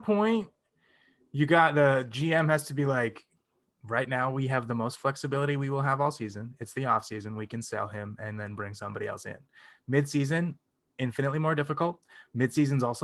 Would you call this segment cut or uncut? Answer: uncut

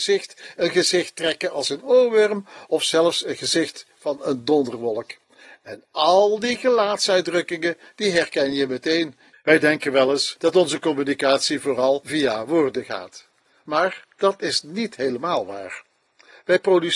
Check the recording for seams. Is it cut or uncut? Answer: cut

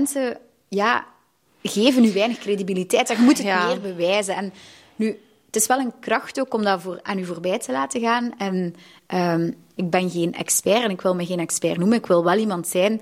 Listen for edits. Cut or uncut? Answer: cut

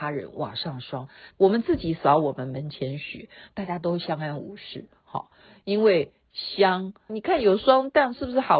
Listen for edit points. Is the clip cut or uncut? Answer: cut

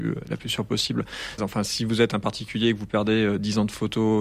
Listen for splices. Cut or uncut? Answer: cut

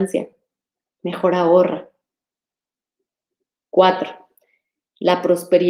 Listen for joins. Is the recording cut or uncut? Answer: uncut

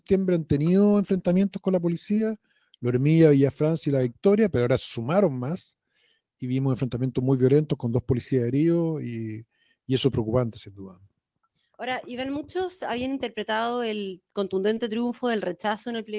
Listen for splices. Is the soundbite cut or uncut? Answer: uncut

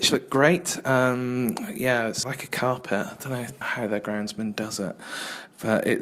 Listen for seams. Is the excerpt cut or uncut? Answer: cut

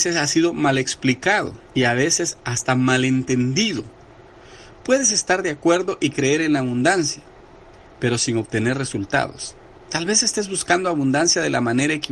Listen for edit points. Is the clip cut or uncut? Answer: cut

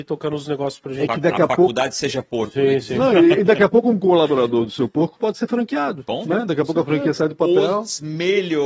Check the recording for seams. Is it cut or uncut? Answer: uncut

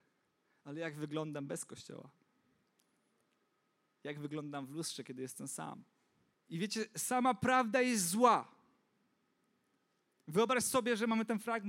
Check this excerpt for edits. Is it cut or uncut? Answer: cut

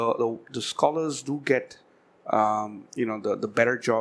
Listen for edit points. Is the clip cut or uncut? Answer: uncut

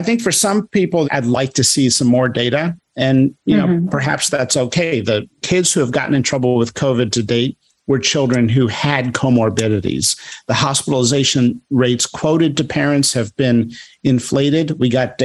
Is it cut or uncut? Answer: cut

